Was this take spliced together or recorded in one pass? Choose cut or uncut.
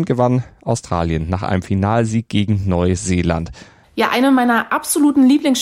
cut